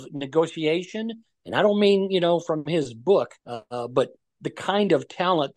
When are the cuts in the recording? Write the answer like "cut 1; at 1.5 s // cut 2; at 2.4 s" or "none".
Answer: cut 1; at 3.4 s